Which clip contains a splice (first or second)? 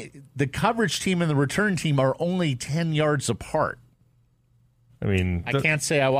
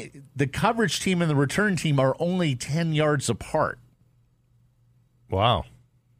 first